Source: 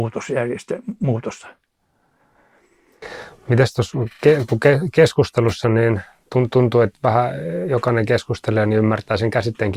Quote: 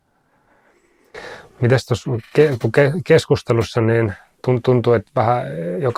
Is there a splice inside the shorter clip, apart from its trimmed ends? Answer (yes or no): no